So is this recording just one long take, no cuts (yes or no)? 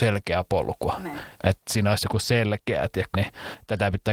no